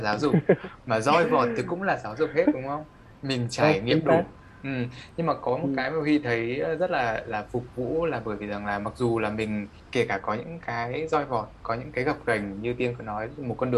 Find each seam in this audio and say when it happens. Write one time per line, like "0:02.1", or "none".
none